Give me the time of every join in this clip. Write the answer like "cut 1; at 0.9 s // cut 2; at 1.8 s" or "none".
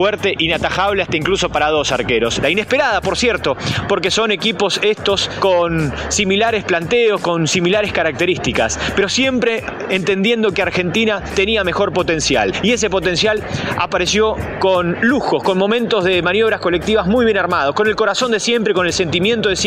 cut 1; at 2.4 s